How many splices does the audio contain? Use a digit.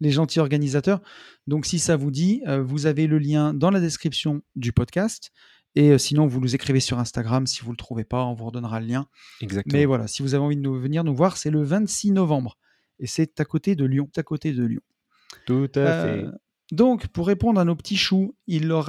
1